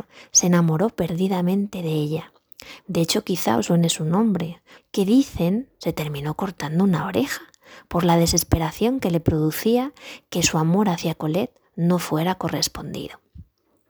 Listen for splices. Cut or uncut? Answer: cut